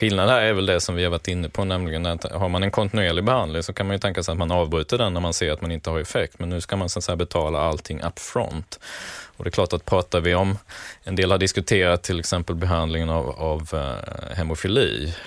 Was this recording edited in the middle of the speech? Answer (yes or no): no